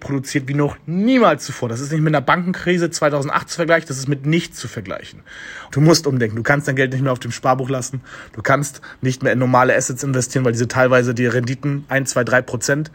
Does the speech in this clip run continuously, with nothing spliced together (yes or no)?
no